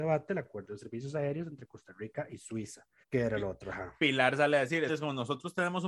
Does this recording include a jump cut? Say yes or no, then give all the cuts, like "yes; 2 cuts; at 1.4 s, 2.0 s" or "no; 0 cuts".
yes; 2 cuts; at 3.0 s, 4.9 s